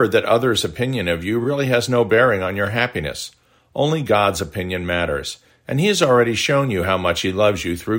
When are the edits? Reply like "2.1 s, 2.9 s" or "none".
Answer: none